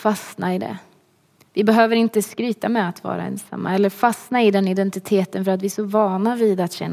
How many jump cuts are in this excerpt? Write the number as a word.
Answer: zero